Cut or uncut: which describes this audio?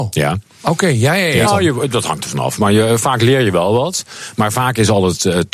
cut